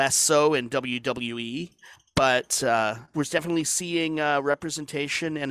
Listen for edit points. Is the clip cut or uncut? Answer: cut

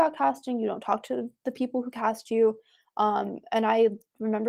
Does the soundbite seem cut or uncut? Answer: uncut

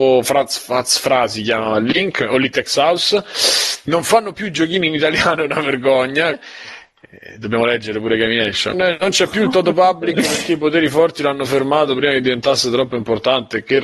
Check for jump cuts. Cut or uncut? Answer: cut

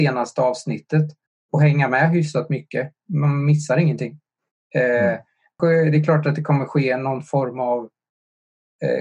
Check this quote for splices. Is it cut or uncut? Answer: cut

